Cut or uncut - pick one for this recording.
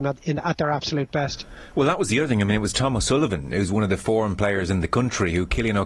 uncut